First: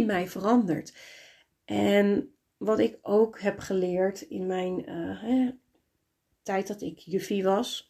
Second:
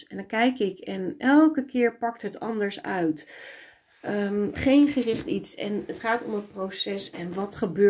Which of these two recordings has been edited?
first; 1 cut; at 6.3 s

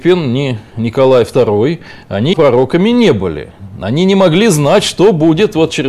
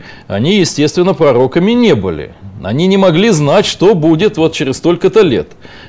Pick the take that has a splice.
first; 1 cut; at 2.3 s

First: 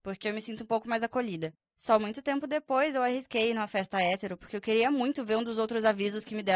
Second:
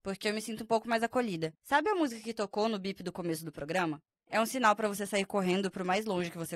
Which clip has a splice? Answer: second; 1 cut; at 1.6 s

